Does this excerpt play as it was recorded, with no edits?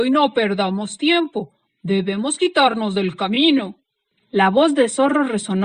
yes; 0 cuts

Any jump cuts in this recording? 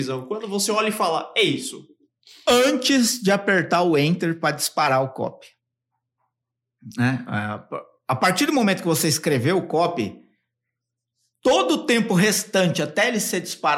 no; 0 cuts

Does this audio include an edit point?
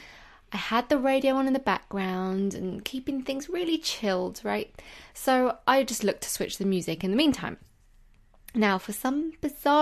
yes; 1 cut; at 5.1 s

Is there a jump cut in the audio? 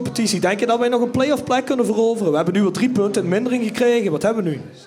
no; 0 cuts

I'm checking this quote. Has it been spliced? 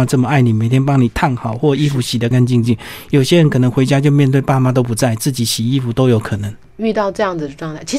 yes; 2 cuts; at 2.3 s, 6.6 s

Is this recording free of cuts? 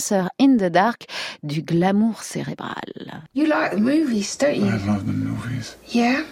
no; 1 cut; at 3.3 s

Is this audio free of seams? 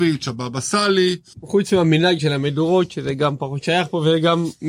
no; 1 cut; at 1.3 s

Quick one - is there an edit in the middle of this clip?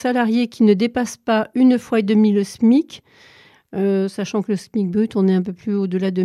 no; 0 cuts

